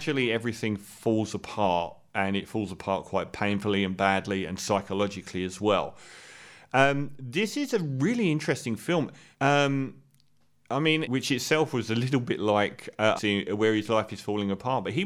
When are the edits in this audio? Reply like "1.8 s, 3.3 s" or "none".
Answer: 9.3 s, 11.0 s, 13.2 s